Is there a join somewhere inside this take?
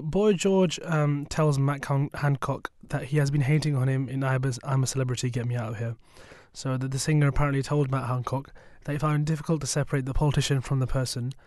no; 0 cuts

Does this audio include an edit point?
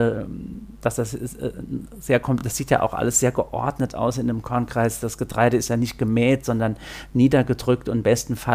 no; 0 cuts

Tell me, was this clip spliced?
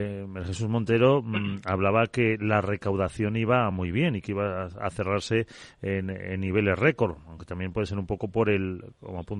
no; 0 cuts

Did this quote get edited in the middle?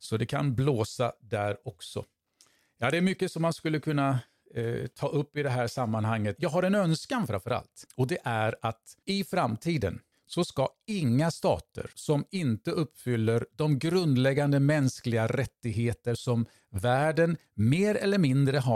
yes; 1 cut; at 6.4 s

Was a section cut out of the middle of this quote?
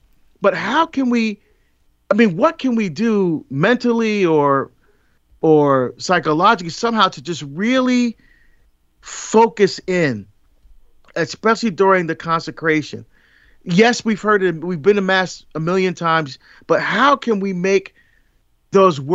no; 0 cuts

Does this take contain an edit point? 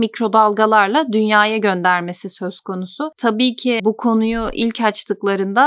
no; 0 cuts

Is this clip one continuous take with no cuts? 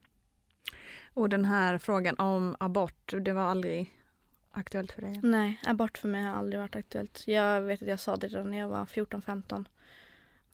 yes; 0 cuts

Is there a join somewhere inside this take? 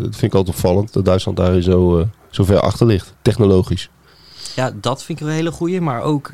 no; 0 cuts

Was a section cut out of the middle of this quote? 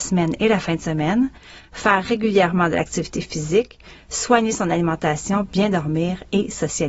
no; 0 cuts

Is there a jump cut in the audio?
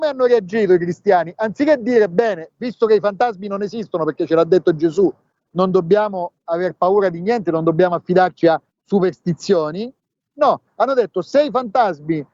no; 0 cuts

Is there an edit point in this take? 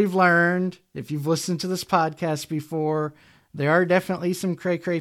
no; 0 cuts

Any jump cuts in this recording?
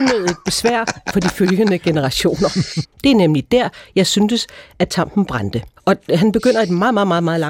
yes; 2 cuts; at 2.8 s, 5.8 s

